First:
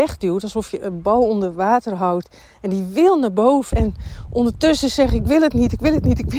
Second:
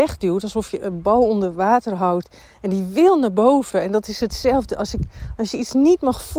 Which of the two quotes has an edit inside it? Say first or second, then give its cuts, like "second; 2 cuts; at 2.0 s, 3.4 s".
first; 1 cut; at 3.7 s